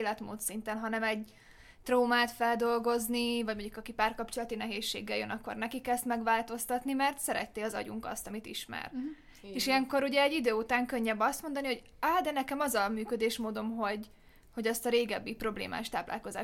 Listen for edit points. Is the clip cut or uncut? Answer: uncut